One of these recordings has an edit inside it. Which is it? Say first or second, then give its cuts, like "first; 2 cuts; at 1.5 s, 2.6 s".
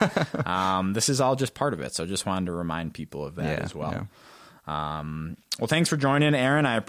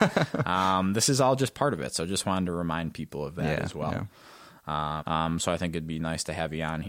second; 1 cut; at 5.0 s